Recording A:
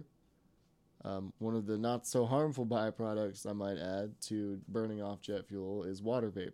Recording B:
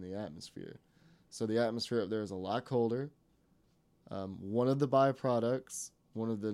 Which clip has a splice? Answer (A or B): A